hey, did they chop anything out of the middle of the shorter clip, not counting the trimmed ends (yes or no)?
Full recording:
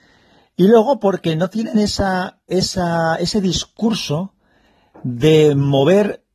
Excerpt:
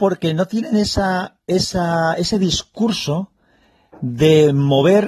no